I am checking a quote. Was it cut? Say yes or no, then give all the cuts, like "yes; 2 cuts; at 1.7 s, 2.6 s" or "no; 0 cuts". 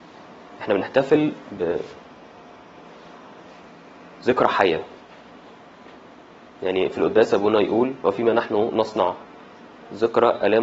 yes; 1 cut; at 1.6 s